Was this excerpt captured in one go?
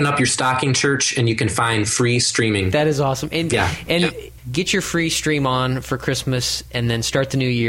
no; 1 cut; at 4.4 s

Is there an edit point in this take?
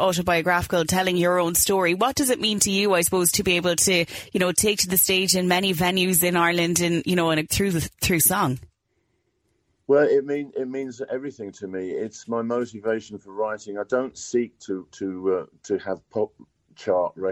yes; 1 cut; at 7.5 s

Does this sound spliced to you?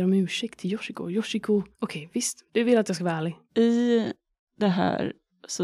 yes; 2 cuts; at 1.7 s, 3.5 s

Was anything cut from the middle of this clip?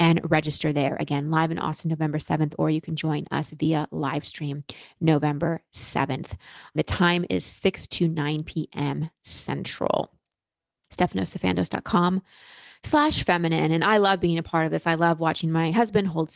no; 0 cuts

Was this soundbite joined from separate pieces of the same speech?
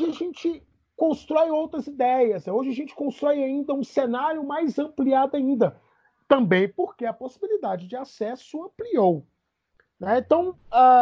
no; 0 cuts

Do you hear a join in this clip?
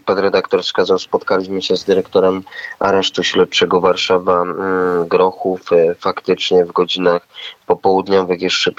no; 0 cuts

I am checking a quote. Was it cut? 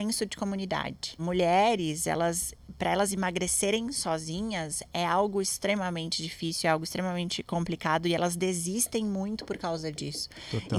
yes; 1 cut; at 1.2 s

